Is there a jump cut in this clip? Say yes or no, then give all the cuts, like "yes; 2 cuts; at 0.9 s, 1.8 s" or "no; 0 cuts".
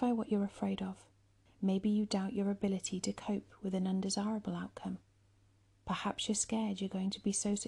yes; 1 cut; at 1.5 s